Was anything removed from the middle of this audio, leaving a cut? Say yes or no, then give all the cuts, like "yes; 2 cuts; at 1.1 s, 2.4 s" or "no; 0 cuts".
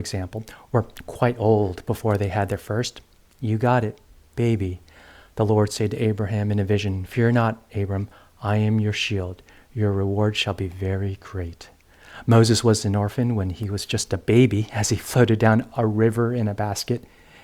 no; 0 cuts